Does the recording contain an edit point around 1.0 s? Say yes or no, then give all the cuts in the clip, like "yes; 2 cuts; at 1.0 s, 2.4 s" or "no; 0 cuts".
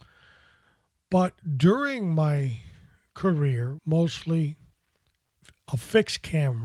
no; 1 cut; at 3.8 s